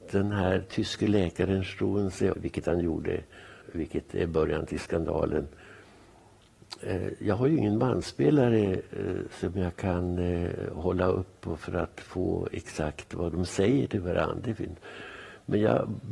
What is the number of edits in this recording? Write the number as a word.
two